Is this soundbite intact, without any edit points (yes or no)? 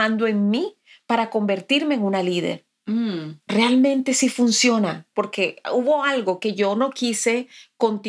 no